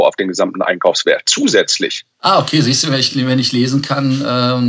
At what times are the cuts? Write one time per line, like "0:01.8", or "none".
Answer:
none